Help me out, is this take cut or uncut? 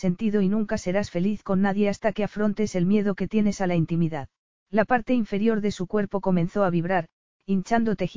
cut